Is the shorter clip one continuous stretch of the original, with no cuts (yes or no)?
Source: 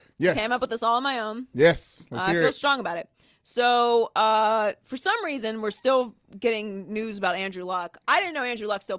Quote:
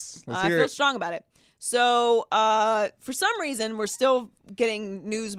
yes